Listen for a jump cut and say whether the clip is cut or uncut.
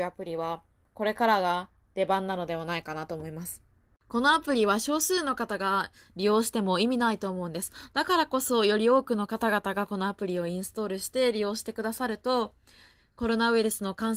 uncut